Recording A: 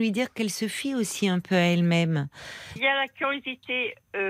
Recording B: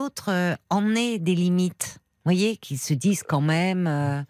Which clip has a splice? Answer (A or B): A